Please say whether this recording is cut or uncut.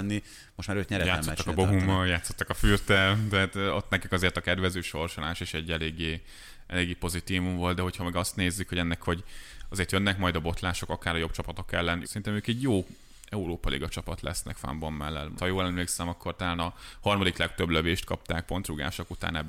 cut